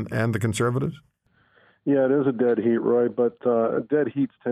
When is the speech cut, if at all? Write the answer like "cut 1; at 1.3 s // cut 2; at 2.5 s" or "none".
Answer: none